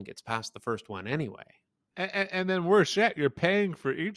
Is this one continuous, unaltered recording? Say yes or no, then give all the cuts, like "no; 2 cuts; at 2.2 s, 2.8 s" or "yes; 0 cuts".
no; 1 cut; at 1.9 s